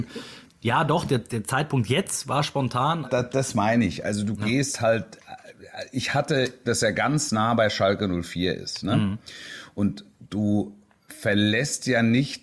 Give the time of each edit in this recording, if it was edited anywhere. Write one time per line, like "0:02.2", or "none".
0:03.0
0:06.6